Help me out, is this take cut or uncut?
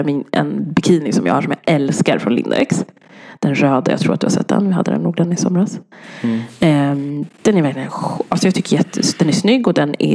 uncut